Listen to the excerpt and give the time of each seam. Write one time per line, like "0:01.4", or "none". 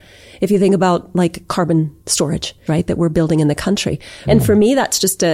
0:02.7
0:04.3